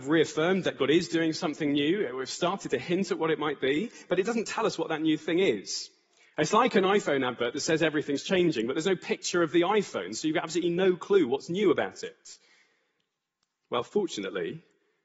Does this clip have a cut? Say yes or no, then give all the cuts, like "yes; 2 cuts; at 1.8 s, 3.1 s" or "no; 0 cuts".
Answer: no; 0 cuts